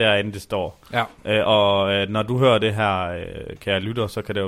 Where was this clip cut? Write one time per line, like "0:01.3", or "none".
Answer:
none